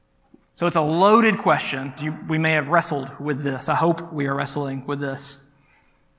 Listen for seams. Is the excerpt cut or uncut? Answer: cut